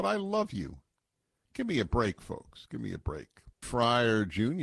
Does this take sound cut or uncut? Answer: cut